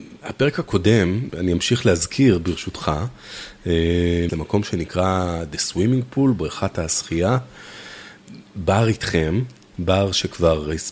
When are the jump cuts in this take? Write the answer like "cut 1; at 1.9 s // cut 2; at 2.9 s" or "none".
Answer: cut 1; at 1.3 s // cut 2; at 4.3 s